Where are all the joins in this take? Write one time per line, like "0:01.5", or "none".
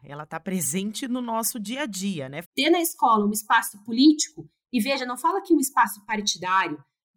0:02.4